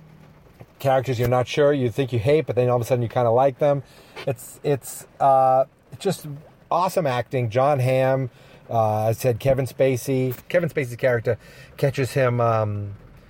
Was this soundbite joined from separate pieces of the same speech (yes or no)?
yes